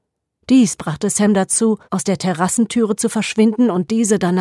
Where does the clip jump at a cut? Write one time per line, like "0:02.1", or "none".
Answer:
0:01.8